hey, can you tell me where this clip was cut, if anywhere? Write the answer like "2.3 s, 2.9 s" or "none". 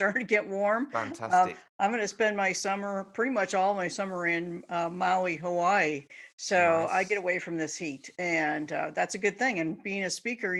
none